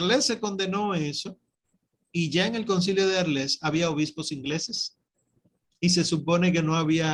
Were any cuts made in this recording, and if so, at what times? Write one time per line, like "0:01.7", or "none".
none